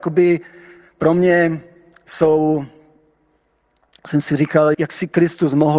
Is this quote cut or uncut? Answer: cut